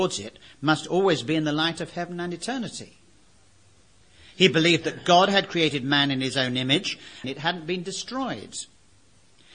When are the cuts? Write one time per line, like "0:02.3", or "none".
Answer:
0:07.2

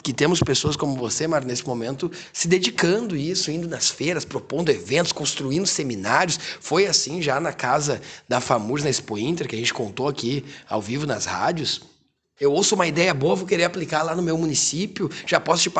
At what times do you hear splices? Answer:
0:12.4

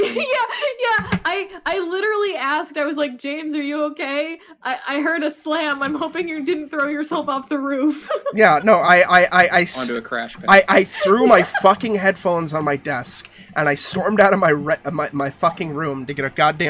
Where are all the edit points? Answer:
none

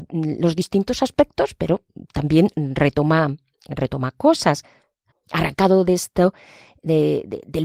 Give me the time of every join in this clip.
0:05.1

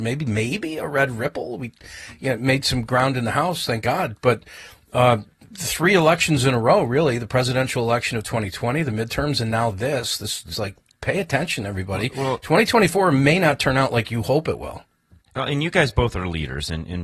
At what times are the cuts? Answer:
0:10.5

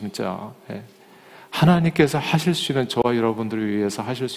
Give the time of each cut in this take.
none

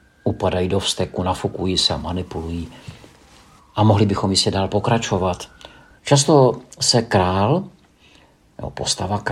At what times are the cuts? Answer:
0:03.6
0:06.0

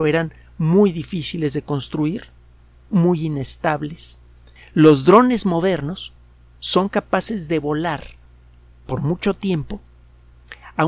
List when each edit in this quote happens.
0:02.8
0:04.6

